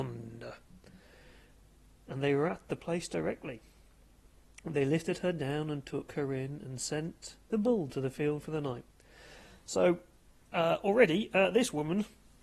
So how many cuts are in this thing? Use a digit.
0